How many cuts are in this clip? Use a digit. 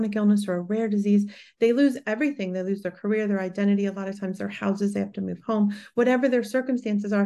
0